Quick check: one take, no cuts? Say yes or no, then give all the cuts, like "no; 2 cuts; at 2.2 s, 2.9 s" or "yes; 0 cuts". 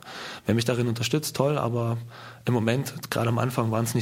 yes; 0 cuts